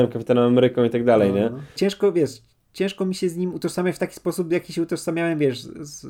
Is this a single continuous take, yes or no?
no